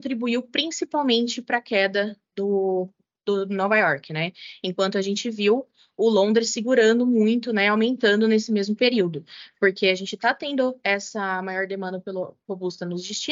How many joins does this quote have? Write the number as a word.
zero